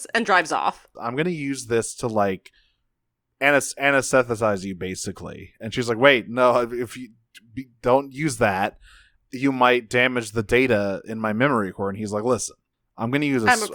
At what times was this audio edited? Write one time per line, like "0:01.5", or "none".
0:00.9